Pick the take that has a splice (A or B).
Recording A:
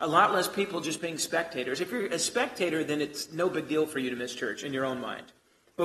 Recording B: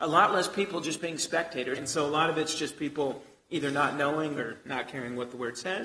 B